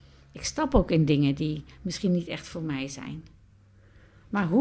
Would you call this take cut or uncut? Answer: uncut